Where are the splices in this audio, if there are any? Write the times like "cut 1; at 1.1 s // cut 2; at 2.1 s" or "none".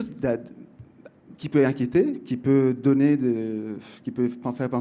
cut 1; at 1.3 s